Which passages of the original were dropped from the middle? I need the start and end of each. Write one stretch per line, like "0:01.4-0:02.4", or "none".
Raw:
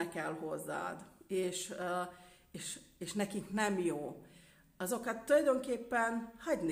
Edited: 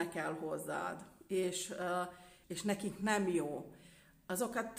0:02.4-0:02.9